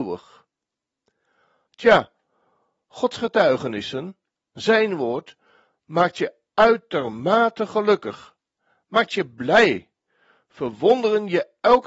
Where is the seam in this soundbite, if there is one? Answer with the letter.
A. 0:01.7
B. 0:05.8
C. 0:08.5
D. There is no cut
A